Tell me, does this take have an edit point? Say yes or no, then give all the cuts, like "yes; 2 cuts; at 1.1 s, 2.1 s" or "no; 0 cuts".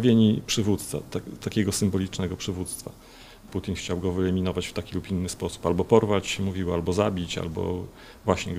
yes; 1 cut; at 3.5 s